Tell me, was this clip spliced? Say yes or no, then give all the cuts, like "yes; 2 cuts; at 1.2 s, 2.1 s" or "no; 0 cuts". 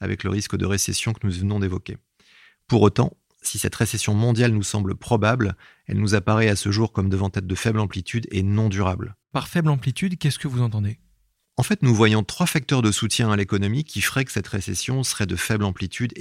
no; 0 cuts